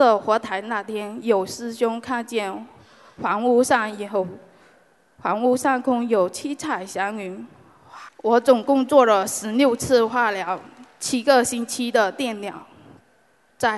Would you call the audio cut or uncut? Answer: cut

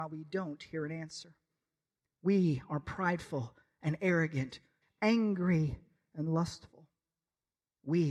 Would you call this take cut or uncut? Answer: cut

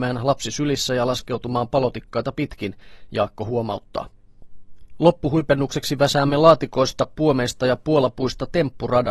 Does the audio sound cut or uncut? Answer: uncut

